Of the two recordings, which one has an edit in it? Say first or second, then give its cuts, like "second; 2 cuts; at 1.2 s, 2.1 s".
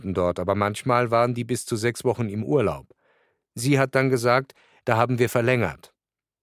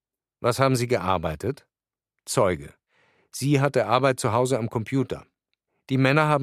first; 1 cut; at 4.8 s